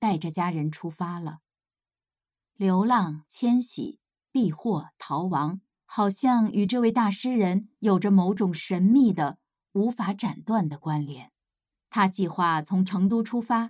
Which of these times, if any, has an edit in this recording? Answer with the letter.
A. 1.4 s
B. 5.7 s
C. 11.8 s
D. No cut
D